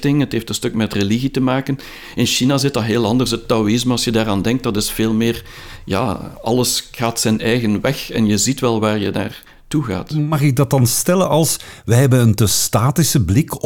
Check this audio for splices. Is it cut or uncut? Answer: uncut